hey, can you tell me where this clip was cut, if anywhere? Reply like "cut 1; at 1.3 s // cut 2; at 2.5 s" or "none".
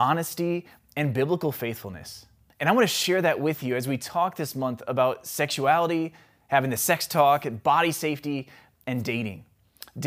cut 1; at 2.5 s